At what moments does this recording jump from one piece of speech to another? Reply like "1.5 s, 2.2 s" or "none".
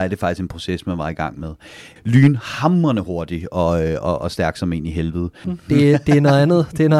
2.0 s, 5.4 s